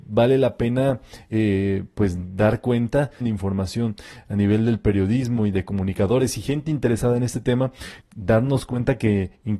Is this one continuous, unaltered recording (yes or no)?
no